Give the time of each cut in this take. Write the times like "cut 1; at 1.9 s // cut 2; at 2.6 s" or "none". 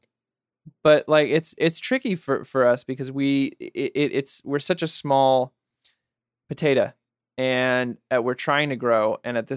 none